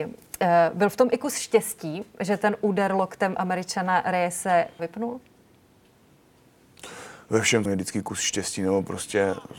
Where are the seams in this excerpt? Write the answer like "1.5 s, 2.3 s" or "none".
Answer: 4.8 s, 7.7 s